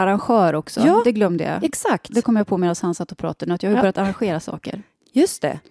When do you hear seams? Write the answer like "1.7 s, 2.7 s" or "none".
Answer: none